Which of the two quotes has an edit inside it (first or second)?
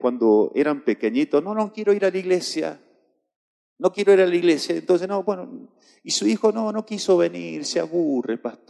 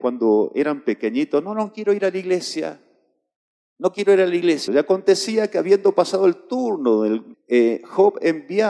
second